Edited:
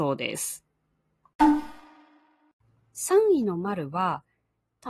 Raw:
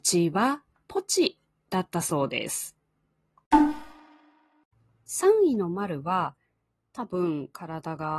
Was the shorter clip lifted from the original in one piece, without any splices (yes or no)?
yes